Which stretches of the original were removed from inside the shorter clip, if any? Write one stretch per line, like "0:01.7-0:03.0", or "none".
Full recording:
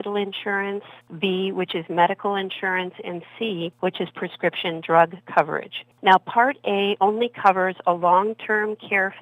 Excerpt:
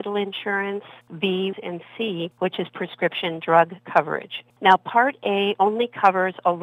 0:01.5-0:02.9